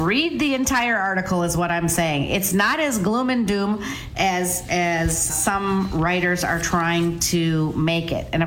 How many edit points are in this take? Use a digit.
1